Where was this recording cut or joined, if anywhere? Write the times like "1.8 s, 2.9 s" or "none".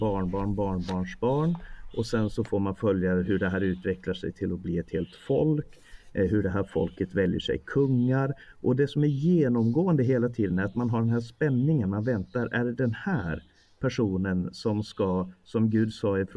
none